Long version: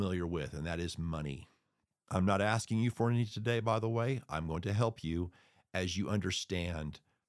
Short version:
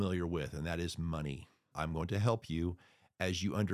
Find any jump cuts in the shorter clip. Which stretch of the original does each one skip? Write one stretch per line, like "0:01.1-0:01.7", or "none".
0:01.7-0:04.3